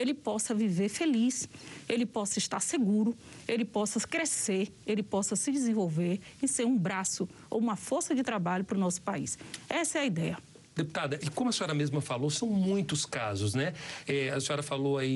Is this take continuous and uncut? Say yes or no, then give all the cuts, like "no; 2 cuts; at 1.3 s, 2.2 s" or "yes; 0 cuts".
no; 1 cut; at 11.2 s